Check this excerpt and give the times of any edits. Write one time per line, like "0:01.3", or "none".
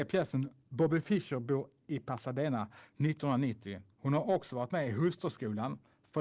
0:03.9